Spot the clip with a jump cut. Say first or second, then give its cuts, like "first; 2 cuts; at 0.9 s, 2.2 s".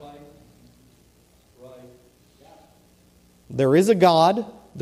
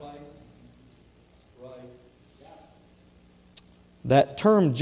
first; 1 cut; at 3.4 s